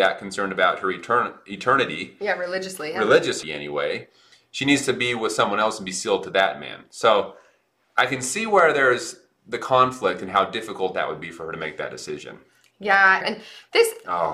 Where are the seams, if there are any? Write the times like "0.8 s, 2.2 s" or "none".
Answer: 3.4 s, 13.2 s